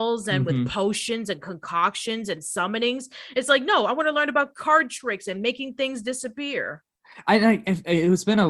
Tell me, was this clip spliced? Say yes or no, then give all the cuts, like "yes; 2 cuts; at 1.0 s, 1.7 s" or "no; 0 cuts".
no; 0 cuts